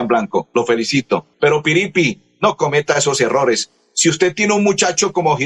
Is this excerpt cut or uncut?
cut